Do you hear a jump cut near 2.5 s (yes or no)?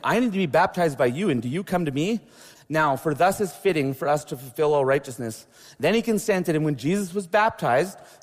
yes